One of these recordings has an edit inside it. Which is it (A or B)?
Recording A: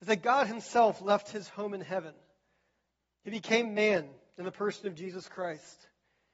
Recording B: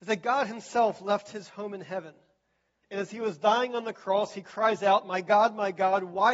B